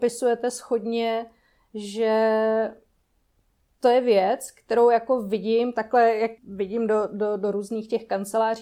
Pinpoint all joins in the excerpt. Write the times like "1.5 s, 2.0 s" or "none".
6.4 s